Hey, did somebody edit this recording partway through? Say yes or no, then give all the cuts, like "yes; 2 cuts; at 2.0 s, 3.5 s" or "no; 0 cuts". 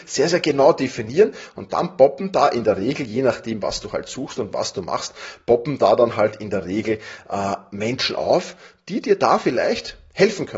no; 0 cuts